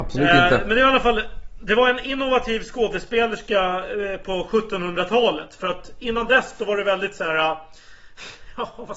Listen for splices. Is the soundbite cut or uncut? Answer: uncut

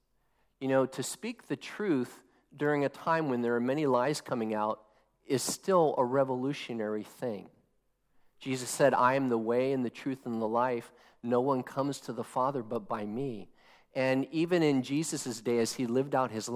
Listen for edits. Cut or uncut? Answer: uncut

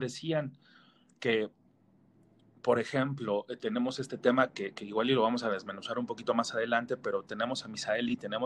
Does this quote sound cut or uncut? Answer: uncut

